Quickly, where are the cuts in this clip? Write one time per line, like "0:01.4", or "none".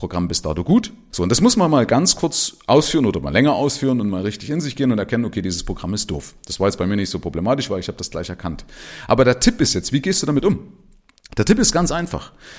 0:01.1